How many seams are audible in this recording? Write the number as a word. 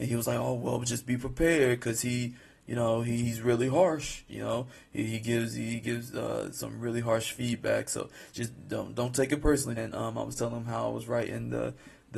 two